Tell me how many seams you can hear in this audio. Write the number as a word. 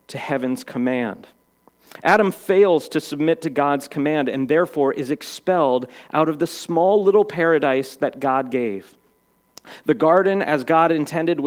zero